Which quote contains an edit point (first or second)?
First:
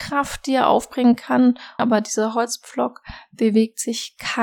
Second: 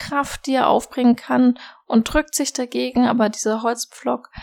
first